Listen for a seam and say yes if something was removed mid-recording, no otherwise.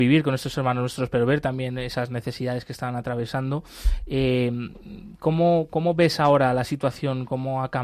no